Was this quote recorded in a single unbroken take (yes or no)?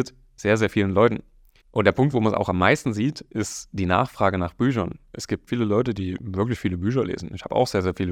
no